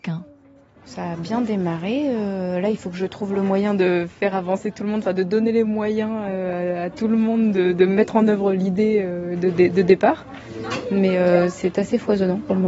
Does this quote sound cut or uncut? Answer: uncut